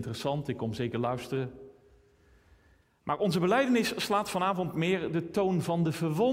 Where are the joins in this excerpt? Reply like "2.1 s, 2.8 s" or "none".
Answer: none